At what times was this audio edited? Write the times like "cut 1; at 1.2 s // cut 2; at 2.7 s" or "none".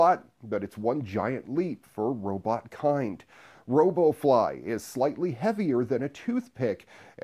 none